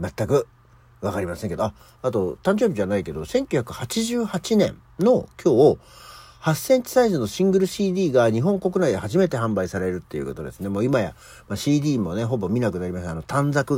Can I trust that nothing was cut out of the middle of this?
yes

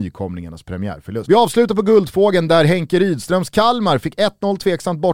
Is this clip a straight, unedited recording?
no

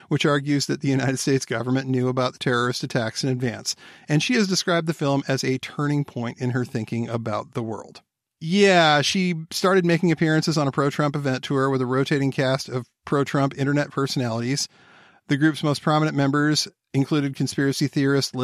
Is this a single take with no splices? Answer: yes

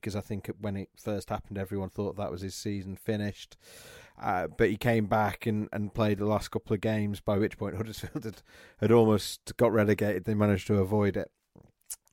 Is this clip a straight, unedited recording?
yes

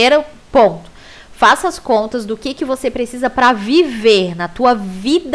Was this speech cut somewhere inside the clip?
no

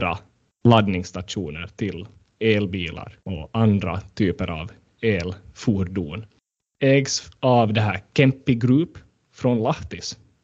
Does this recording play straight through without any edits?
no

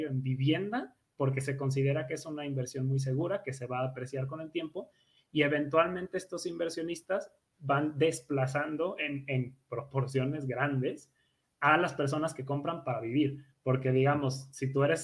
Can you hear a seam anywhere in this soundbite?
no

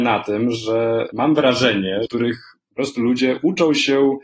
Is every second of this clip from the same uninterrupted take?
no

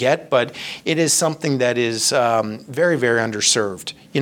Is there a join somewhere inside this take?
no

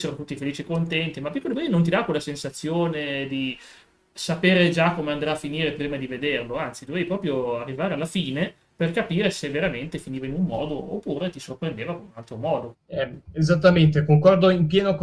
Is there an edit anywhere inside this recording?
yes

